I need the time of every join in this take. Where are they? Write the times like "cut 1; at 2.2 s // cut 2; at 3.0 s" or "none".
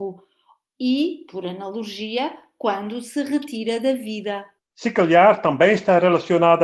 cut 1; at 4.7 s